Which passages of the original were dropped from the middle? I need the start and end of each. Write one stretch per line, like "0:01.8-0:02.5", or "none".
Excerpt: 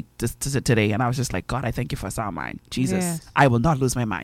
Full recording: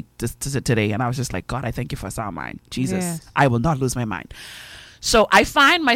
none

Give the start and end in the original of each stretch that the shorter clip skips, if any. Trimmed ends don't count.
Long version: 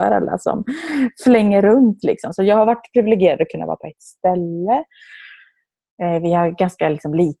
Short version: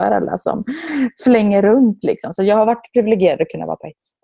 none

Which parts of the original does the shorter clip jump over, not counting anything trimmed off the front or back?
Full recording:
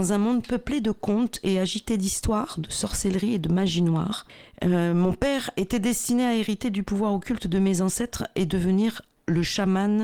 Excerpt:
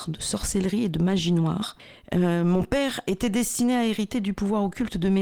none

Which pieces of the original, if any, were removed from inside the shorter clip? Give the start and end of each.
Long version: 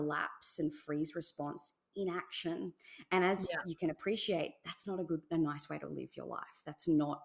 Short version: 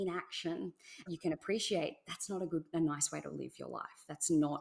0:03.1-0:03.6

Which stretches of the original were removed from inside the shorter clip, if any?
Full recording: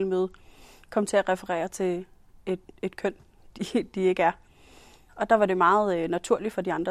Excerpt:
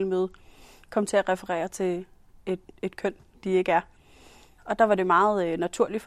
0:03.3-0:03.9

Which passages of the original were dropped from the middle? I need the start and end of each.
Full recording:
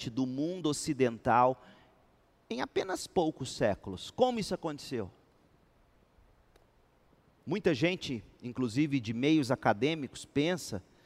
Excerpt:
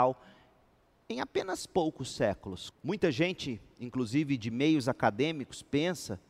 0:04.1-0:07.3

